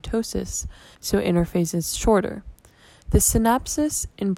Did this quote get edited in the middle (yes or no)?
yes